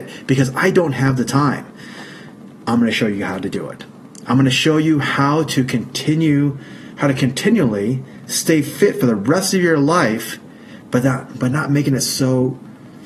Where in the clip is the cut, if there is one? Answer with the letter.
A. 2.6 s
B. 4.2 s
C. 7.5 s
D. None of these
D